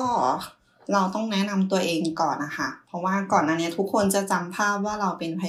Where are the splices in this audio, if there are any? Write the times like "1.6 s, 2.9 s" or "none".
none